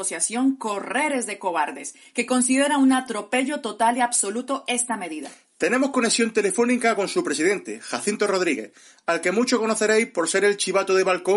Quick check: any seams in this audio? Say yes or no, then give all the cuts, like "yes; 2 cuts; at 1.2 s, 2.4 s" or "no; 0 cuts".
no; 0 cuts